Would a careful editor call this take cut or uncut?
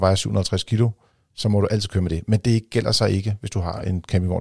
uncut